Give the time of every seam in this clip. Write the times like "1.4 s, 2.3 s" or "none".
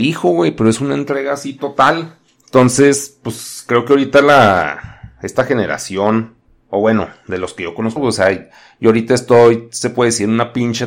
8.0 s